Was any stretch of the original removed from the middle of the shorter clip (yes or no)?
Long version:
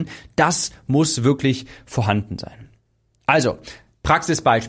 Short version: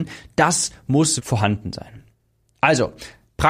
yes